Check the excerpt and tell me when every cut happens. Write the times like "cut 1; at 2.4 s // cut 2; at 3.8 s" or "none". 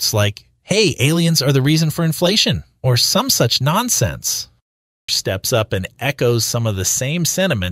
cut 1; at 5.1 s